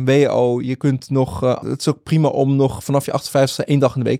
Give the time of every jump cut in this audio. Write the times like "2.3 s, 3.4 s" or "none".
1.6 s